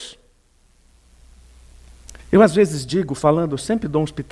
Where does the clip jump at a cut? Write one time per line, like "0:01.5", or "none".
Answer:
0:02.2